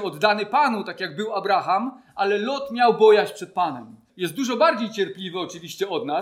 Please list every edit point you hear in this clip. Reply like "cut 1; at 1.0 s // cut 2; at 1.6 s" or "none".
cut 1; at 4.1 s